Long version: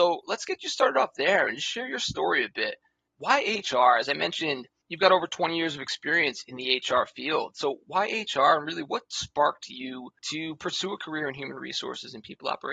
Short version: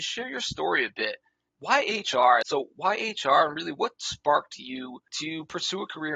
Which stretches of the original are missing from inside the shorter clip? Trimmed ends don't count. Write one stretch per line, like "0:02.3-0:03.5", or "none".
0:04.0-0:07.5